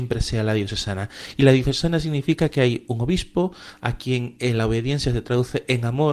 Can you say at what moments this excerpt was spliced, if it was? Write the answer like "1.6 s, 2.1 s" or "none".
none